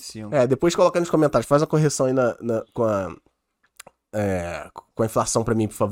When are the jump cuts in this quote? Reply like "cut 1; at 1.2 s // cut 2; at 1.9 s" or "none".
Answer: none

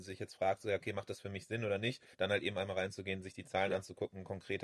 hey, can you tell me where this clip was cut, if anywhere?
cut 1; at 2.1 s

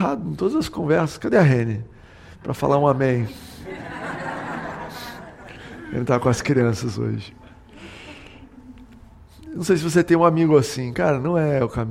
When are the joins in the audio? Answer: none

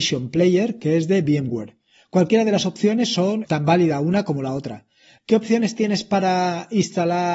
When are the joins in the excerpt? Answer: cut 1; at 3.4 s // cut 2; at 5.2 s

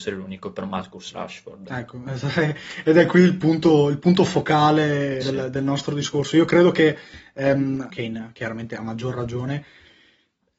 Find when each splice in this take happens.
cut 1; at 5.2 s // cut 2; at 7.9 s

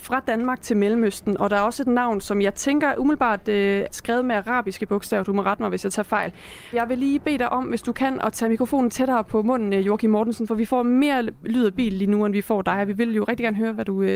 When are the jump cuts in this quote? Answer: cut 1; at 3.9 s // cut 2; at 6.7 s

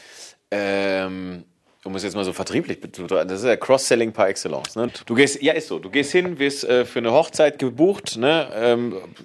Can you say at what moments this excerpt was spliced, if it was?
cut 1; at 4.9 s

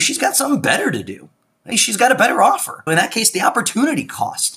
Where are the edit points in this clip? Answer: cut 1; at 1.7 s // cut 2; at 2.9 s

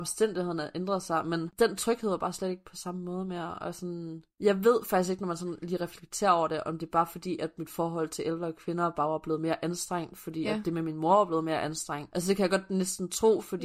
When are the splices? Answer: none

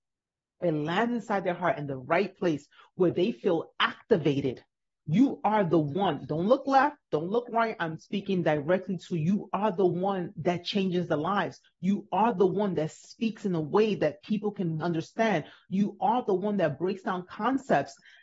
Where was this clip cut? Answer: cut 1; at 5.0 s // cut 2; at 14.8 s

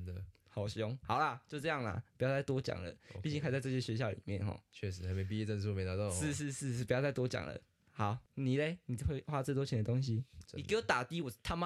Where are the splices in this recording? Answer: cut 1; at 8.3 s // cut 2; at 10.4 s

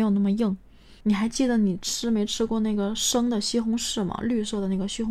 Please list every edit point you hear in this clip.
cut 1; at 1.0 s

